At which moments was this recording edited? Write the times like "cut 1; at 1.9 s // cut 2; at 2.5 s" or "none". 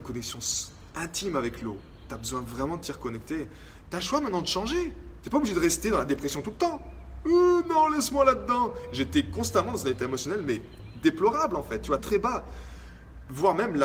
cut 1; at 3.9 s // cut 2; at 12.0 s